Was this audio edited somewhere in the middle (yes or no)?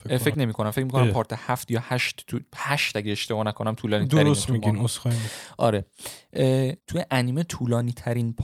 yes